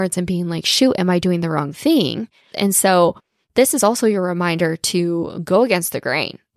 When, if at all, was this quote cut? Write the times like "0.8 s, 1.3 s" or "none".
2.5 s